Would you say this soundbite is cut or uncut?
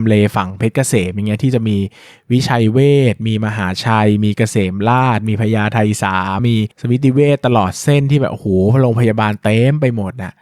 cut